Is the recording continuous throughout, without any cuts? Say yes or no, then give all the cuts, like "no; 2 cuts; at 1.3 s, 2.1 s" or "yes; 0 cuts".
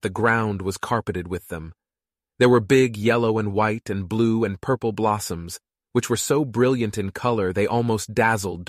no; 1 cut; at 5.8 s